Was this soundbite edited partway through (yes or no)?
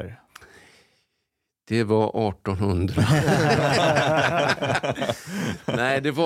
no